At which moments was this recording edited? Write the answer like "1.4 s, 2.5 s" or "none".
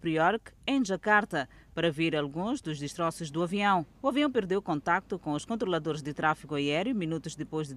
3.9 s